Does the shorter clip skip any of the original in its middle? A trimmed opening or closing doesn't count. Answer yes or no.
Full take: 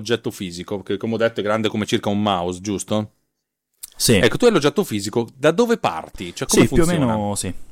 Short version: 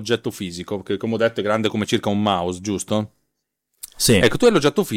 no